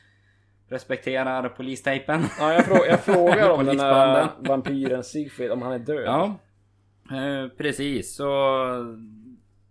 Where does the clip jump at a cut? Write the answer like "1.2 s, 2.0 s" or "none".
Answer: none